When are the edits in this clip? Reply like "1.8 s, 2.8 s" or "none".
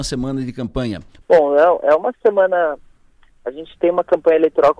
1.2 s